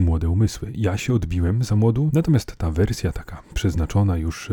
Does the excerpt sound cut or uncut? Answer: cut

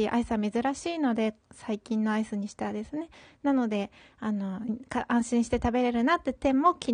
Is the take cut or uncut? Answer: cut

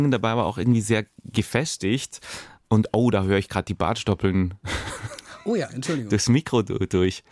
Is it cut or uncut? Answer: uncut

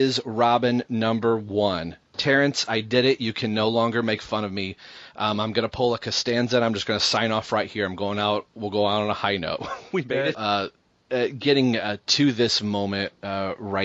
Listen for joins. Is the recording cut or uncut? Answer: cut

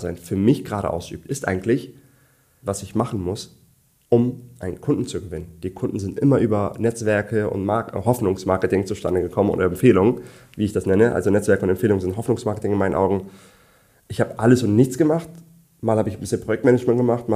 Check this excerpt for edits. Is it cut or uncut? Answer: cut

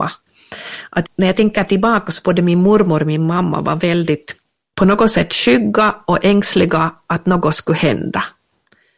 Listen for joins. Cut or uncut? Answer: uncut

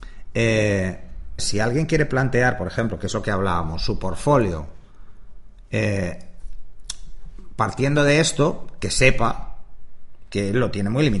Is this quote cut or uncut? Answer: cut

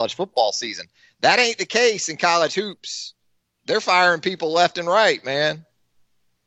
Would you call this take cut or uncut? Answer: uncut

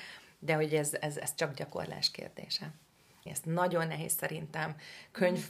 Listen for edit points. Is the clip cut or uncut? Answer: cut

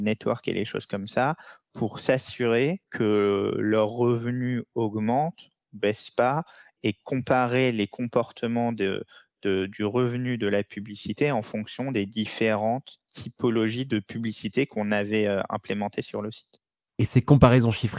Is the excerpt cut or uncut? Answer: uncut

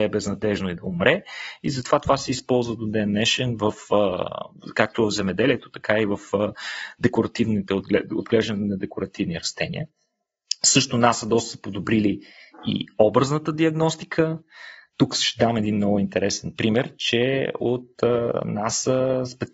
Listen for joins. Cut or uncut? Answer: uncut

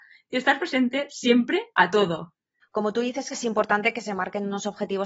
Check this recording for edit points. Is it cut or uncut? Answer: cut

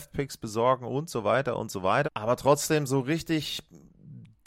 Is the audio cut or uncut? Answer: cut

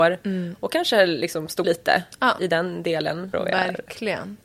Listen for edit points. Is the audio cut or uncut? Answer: cut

